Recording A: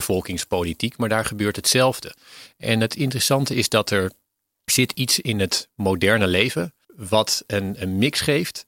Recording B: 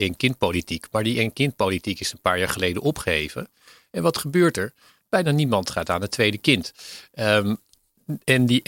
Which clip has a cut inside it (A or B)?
A